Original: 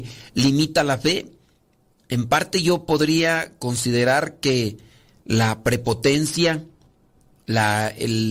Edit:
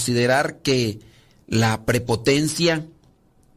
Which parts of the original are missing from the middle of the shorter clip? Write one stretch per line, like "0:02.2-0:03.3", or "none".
none